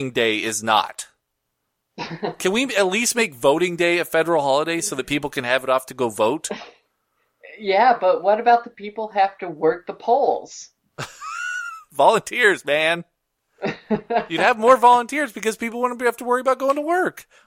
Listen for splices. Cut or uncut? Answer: uncut